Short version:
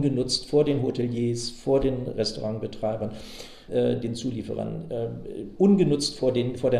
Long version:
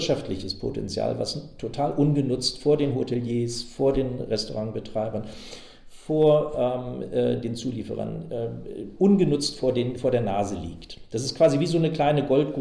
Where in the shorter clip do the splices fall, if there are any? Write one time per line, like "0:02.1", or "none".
0:03.7